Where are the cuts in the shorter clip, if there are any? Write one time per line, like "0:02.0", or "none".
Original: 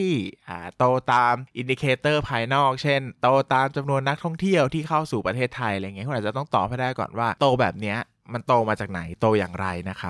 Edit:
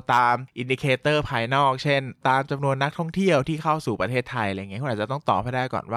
0:02.2